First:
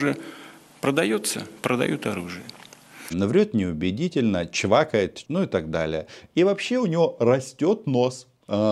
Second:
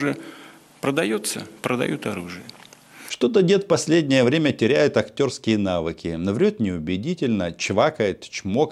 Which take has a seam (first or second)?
first